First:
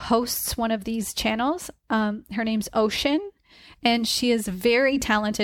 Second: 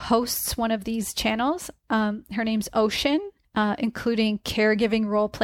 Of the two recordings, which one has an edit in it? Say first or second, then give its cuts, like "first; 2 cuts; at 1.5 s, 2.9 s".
second; 1 cut; at 3.4 s